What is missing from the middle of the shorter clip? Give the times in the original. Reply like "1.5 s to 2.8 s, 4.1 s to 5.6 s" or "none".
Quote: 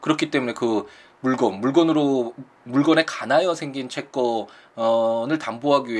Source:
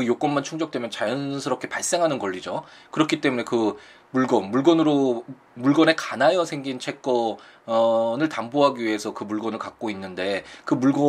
none